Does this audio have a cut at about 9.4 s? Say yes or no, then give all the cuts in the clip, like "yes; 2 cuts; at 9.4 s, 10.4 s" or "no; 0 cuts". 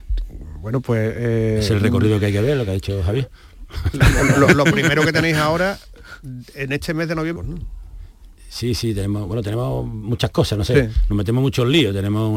no; 1 cut; at 7.4 s